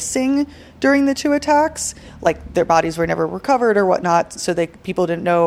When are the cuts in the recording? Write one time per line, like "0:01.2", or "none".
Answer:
0:04.4